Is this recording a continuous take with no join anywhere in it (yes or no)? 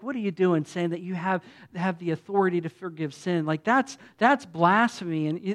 yes